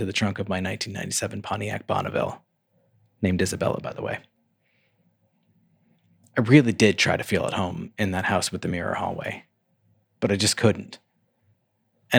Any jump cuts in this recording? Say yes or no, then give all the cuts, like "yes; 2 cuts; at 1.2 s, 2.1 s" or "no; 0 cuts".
no; 0 cuts